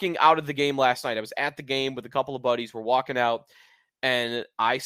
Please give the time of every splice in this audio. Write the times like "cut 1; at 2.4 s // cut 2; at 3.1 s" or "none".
none

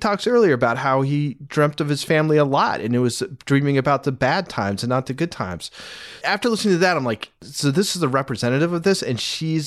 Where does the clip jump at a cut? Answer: cut 1; at 6.2 s

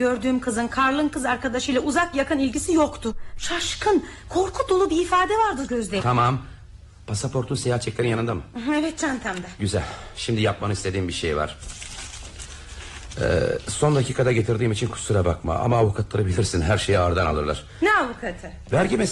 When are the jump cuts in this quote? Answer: cut 1; at 6.0 s

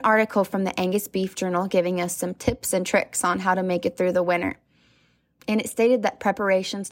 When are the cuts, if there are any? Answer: none

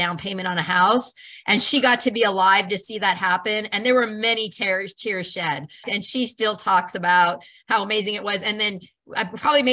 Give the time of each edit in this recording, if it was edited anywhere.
cut 1; at 5.8 s

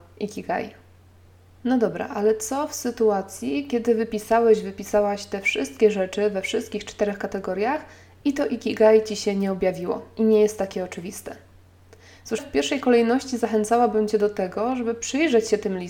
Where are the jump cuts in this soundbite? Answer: cut 1; at 12.4 s

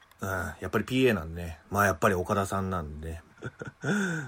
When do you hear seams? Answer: cut 1; at 1.6 s // cut 2; at 3.3 s

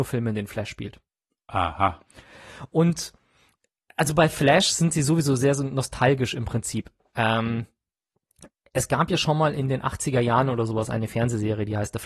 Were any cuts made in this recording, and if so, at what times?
none

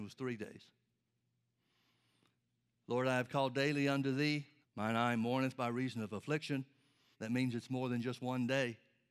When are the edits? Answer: cut 1; at 4.6 s // cut 2; at 7.1 s

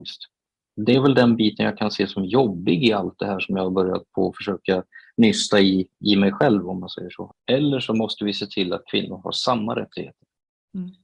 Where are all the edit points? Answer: cut 1; at 7.3 s

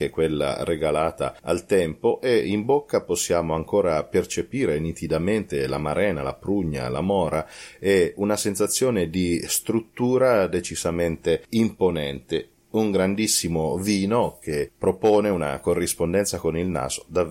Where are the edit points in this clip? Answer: none

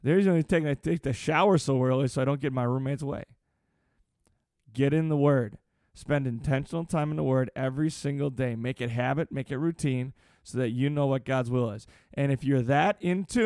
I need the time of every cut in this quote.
none

